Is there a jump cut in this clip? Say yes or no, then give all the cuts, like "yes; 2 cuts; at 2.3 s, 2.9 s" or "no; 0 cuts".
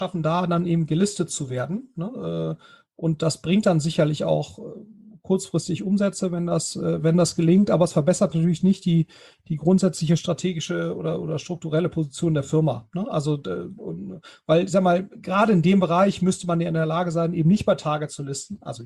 no; 0 cuts